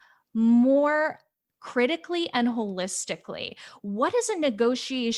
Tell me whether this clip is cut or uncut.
uncut